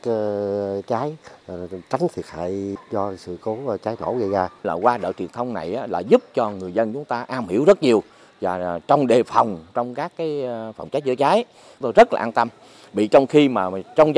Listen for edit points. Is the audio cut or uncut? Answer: cut